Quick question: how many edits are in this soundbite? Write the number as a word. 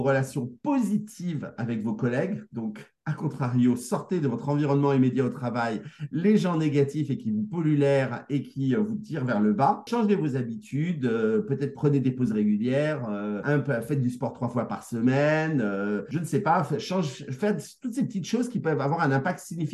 zero